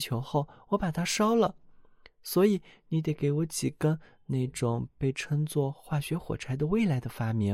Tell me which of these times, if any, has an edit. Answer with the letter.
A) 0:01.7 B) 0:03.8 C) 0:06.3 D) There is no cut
D